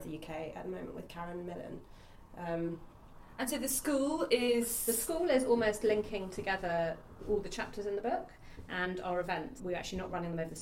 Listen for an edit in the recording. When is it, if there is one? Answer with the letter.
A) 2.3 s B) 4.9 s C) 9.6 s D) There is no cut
C